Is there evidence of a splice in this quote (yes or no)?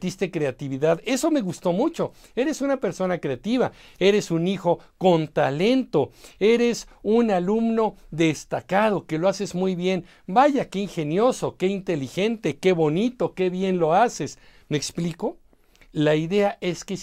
no